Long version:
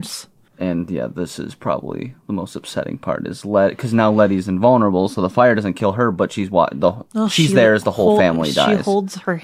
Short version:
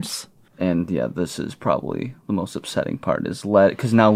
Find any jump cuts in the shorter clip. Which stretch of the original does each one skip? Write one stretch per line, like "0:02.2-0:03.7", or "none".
none